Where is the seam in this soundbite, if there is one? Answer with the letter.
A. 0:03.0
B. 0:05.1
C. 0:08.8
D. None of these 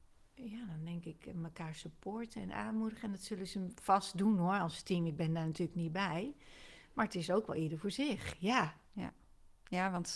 D